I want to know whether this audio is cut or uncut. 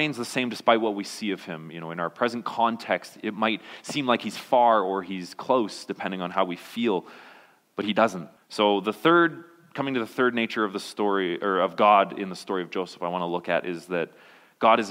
cut